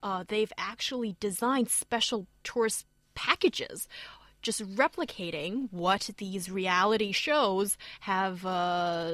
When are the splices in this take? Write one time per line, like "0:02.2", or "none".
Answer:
0:02.4